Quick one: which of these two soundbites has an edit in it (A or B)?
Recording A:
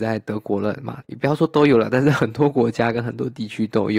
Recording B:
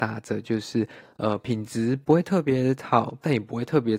A